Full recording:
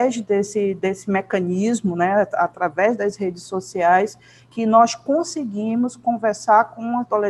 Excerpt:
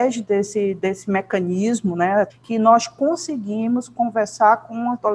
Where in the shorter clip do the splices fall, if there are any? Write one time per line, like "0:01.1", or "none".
0:02.3